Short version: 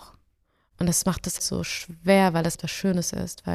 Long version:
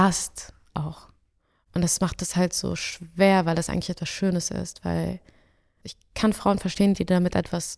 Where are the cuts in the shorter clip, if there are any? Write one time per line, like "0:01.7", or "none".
0:01.4
0:02.5